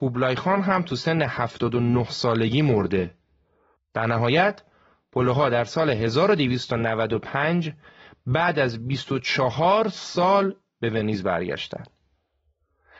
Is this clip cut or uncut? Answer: cut